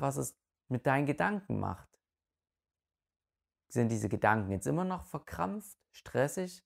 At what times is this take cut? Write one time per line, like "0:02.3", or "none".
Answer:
none